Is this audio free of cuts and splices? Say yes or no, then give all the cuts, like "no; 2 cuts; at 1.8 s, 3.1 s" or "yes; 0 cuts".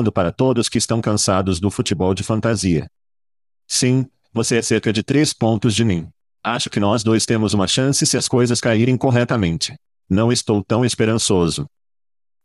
yes; 0 cuts